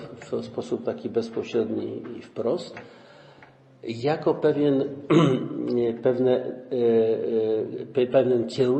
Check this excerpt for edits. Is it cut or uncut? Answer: uncut